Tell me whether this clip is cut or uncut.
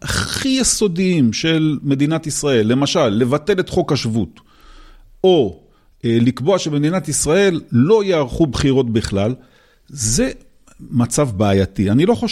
uncut